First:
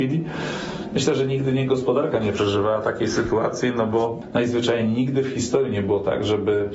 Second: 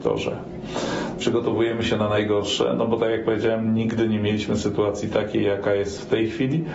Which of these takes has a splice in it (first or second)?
second